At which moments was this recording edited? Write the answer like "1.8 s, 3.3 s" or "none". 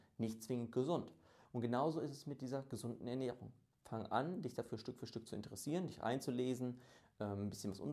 1.4 s